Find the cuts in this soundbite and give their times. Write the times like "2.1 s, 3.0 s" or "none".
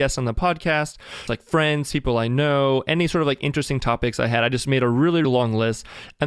1.3 s, 5.2 s